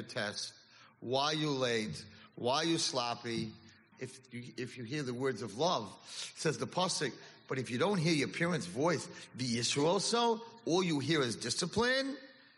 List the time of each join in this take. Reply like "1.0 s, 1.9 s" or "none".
3.9 s